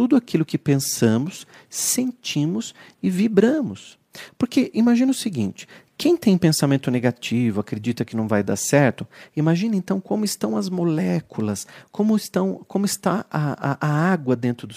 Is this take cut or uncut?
uncut